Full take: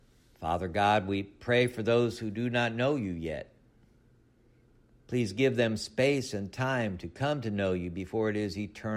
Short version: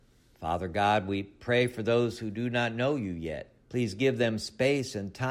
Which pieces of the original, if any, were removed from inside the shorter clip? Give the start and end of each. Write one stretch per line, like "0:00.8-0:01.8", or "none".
0:03.6-0:05.0